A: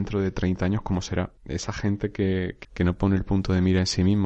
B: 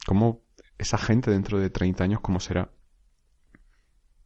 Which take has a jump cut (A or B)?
A